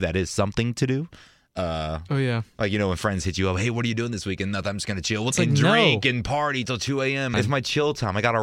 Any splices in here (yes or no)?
yes